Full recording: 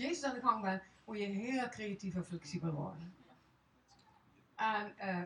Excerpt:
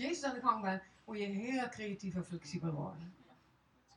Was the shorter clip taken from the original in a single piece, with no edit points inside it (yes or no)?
yes